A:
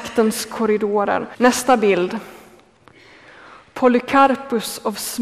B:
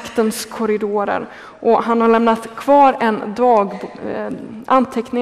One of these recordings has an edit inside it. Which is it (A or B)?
A